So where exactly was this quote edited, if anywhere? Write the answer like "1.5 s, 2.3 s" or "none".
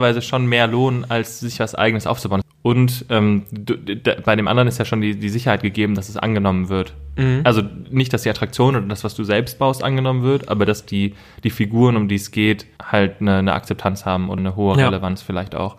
2.4 s, 12.8 s, 14.4 s